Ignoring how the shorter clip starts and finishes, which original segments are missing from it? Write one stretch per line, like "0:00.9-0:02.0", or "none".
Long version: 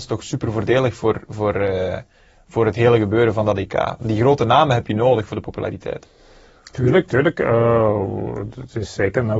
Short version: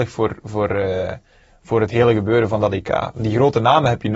none